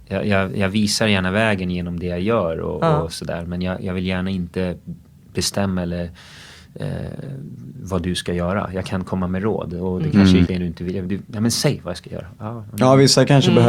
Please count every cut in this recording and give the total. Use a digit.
1